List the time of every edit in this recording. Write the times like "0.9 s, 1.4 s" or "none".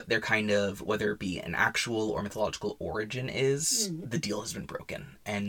4.0 s